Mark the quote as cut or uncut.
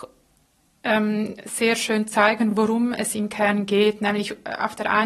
uncut